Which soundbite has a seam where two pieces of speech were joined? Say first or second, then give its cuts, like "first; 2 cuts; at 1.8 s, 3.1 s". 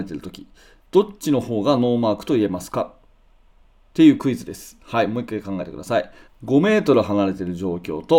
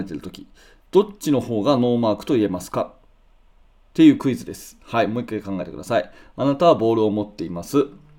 first; 1 cut; at 6.3 s